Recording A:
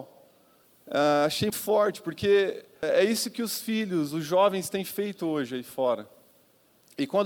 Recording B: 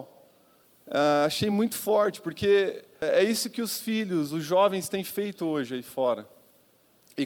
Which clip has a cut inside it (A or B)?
A